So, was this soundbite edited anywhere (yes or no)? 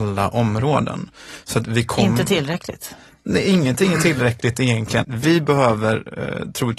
yes